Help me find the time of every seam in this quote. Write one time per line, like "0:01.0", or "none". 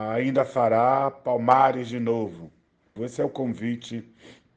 0:03.0